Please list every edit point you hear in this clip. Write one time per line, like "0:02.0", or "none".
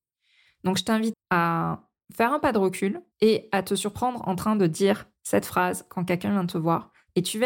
0:01.1
0:03.1

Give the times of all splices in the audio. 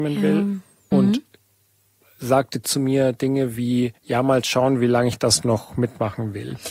0:00.9
0:04.0

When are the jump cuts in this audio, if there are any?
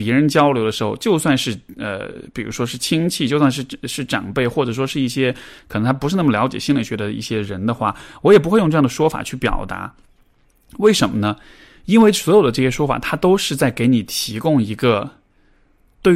none

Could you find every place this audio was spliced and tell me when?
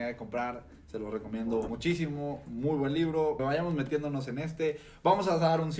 0:01.7
0:03.4

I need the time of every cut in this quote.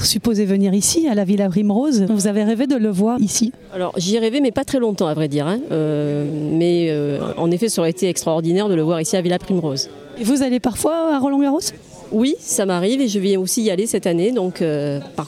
0:03.2
0:10.2

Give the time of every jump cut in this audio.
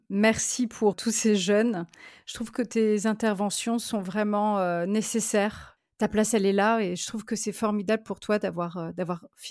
0:00.9

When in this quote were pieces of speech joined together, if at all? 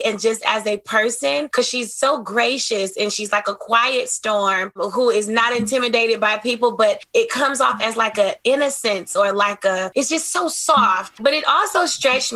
0:11.2

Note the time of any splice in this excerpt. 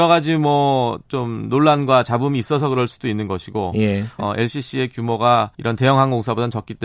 0:04.2
0:05.5

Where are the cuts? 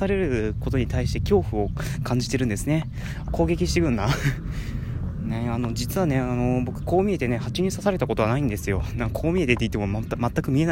0:03.3

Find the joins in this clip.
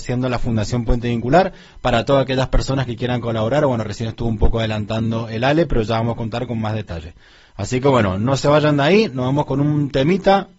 none

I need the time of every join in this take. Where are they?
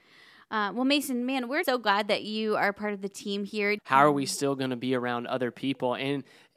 0:01.6
0:03.8

